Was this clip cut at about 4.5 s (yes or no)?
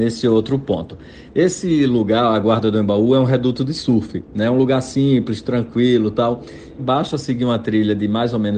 no